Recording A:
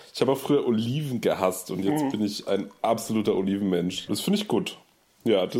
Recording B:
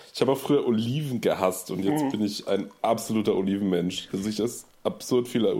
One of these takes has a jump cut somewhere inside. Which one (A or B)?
A